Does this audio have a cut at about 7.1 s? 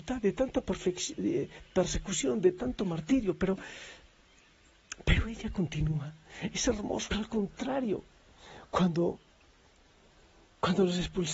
yes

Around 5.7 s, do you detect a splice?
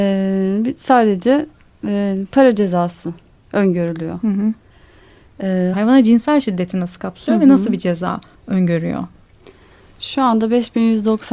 yes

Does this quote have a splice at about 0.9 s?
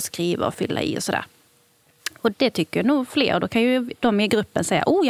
no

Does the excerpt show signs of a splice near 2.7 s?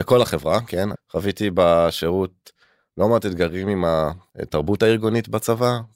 no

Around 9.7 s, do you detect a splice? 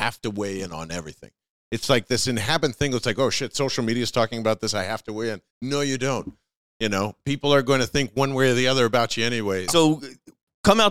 yes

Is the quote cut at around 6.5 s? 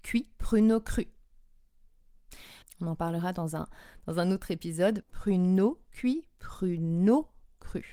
no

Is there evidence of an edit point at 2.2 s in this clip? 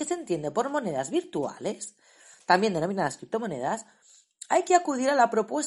no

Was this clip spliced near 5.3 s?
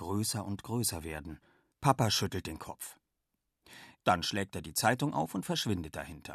no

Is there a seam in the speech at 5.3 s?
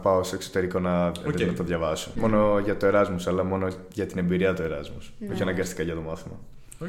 no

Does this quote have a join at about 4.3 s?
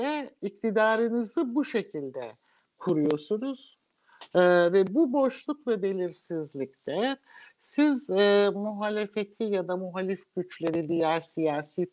yes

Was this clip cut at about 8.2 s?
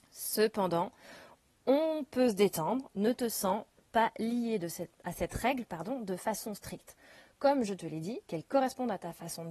yes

